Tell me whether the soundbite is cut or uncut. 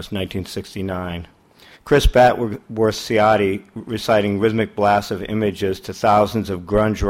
cut